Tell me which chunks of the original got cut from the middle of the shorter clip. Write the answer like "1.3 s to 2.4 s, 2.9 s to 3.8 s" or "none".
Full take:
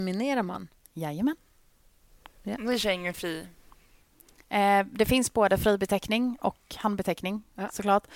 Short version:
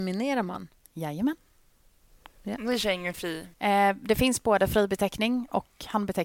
3.5 s to 4.4 s